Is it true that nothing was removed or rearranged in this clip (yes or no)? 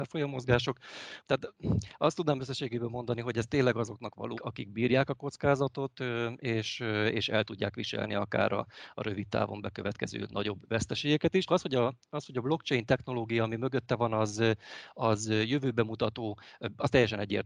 no